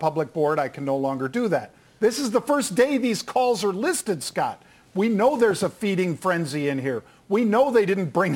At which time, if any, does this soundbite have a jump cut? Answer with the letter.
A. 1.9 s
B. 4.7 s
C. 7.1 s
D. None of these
A